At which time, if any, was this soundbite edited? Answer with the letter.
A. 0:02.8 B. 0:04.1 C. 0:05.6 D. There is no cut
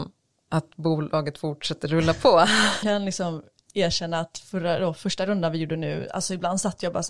A